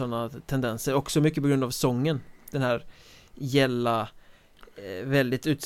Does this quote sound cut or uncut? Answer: uncut